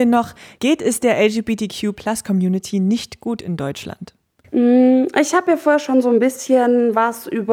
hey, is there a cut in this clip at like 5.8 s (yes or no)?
no